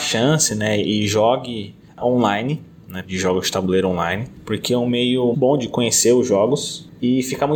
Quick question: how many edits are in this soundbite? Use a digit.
2